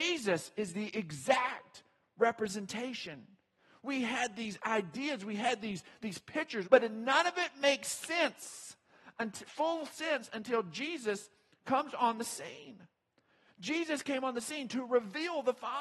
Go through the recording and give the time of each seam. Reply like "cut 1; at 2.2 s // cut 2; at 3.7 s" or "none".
cut 1; at 6.6 s